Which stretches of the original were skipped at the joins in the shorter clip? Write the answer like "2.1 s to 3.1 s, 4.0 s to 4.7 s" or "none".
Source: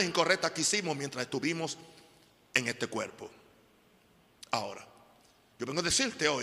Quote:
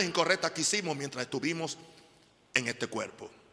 none